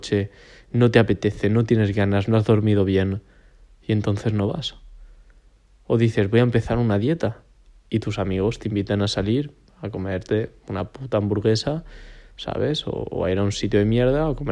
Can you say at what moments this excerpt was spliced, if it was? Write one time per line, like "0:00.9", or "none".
none